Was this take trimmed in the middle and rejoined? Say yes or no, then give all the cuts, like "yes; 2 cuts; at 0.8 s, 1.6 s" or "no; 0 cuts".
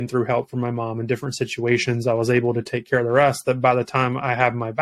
no; 0 cuts